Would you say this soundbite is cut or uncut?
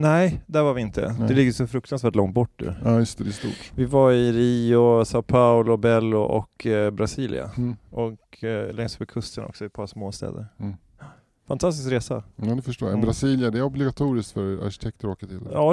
uncut